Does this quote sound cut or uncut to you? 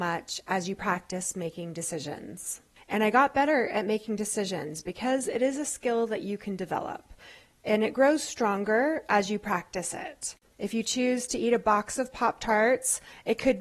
cut